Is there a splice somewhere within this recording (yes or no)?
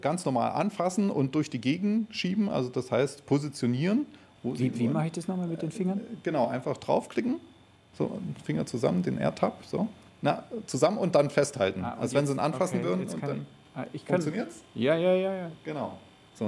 no